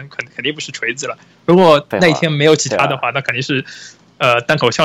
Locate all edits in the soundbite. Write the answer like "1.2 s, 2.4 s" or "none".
1.9 s